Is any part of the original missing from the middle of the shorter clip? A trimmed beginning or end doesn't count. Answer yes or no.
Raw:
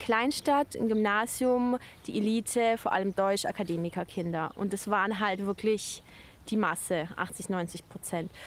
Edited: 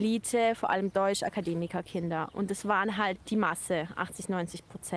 yes